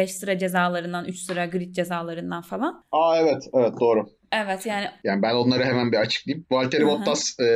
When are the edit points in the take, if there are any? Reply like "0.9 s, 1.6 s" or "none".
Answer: none